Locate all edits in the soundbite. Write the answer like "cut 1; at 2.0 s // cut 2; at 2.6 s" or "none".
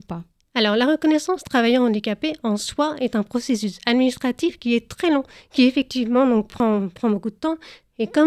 none

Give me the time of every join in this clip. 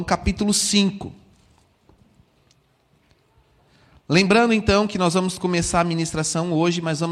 none

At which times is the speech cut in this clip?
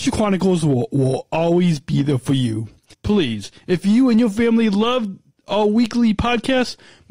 cut 1; at 2.9 s

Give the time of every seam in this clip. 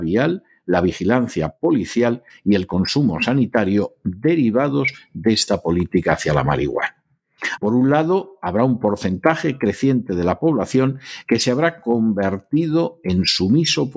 cut 1; at 7.6 s

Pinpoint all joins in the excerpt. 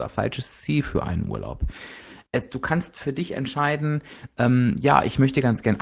cut 1; at 2.3 s

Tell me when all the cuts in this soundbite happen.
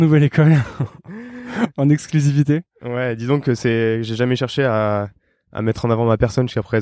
none

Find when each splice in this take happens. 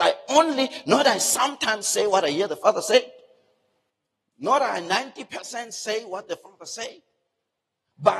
none

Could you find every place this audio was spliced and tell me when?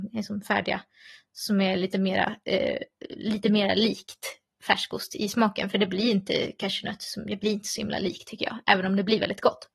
none

